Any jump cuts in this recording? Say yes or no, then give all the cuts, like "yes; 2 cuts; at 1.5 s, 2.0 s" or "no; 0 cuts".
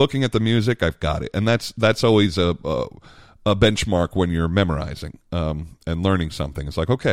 no; 0 cuts